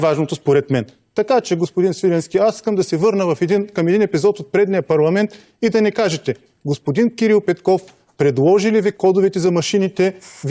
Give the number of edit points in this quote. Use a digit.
0